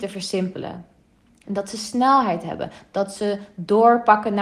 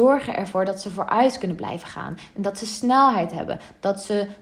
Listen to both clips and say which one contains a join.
first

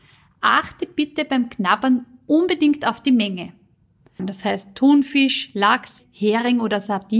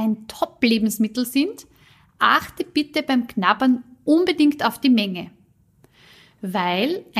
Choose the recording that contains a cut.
first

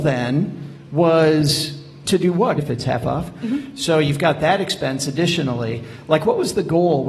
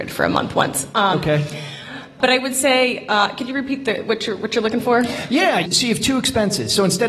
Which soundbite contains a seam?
first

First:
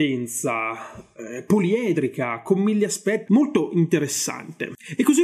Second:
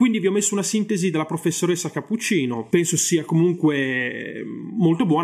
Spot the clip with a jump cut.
first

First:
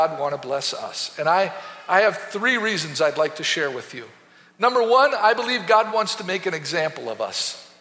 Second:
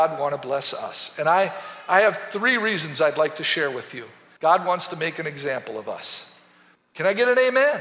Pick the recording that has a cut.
second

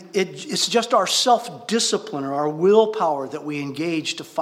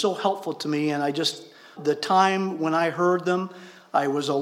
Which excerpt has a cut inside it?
second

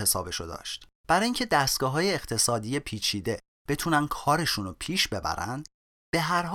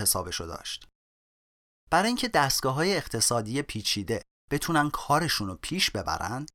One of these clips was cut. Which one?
first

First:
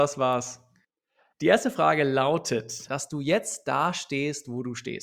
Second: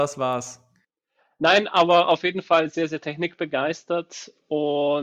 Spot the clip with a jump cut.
first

